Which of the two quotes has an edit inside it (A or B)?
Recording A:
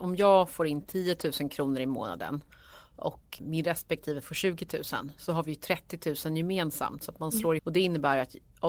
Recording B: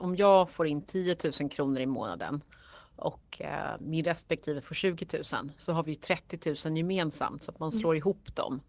A